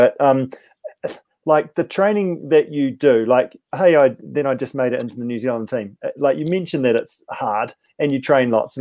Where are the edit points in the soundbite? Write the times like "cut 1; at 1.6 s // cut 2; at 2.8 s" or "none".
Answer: none